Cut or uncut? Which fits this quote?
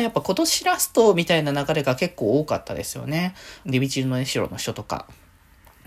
cut